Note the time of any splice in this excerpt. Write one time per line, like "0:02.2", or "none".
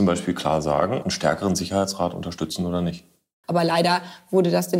0:01.0
0:03.4